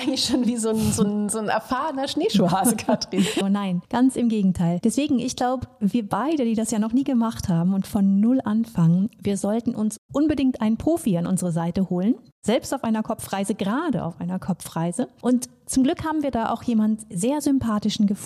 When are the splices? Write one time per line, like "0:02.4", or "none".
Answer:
0:03.4